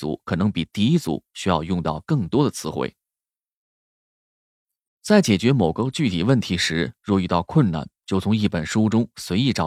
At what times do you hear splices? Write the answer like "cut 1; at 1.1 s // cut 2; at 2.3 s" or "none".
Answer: cut 1; at 4.9 s